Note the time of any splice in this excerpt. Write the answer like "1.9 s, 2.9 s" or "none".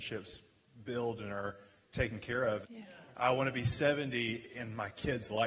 2.6 s